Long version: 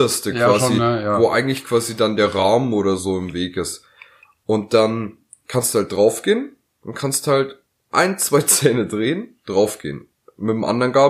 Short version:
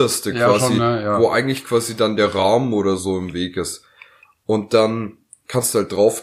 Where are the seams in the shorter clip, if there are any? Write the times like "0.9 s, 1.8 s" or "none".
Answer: none